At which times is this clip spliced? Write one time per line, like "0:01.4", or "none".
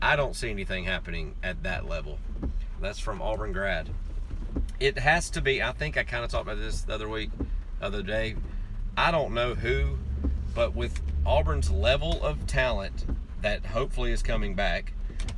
0:02.8

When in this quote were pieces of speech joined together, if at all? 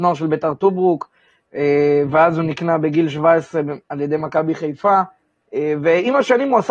none

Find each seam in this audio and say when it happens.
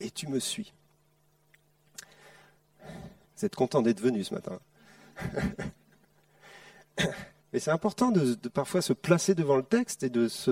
none

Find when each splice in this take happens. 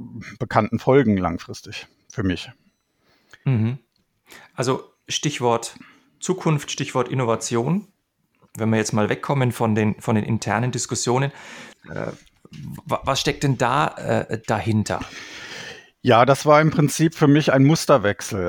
0:11.7

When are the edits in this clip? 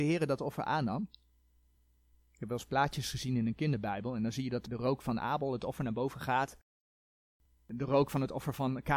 none

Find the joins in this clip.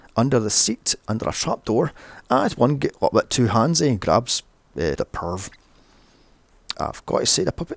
0:05.0
0:06.7

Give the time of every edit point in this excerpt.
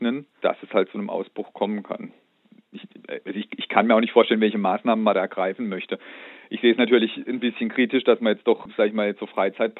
none

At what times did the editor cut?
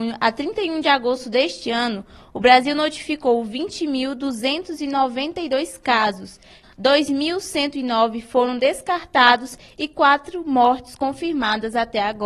0:06.6

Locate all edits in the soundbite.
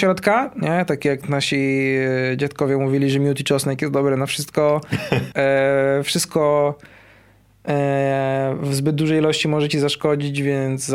0:05.3

